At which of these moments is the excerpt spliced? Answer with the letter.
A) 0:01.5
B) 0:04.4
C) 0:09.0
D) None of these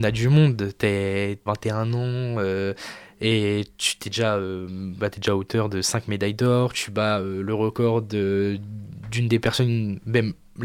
A